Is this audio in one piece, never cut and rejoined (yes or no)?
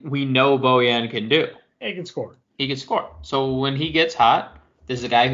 yes